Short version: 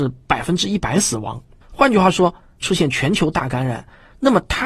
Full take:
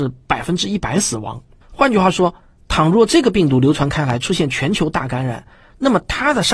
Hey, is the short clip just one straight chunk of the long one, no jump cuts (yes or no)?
no